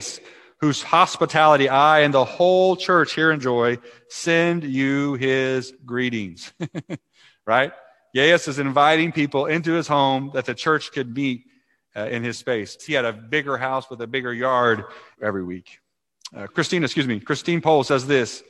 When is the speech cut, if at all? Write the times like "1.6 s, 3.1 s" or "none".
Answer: 12.8 s, 15.1 s, 16.5 s